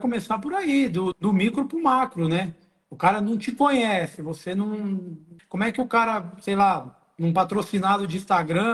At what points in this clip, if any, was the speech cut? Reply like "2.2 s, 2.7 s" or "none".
1.1 s, 5.4 s